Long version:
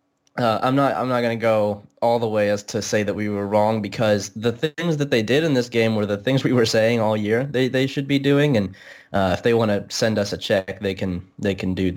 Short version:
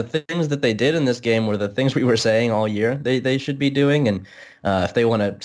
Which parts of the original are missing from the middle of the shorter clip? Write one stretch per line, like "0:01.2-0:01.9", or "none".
none